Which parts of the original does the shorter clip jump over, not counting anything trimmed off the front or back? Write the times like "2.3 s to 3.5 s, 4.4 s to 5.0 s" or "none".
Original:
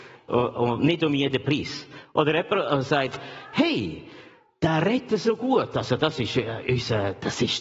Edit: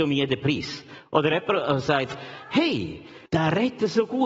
4.3 s to 4.6 s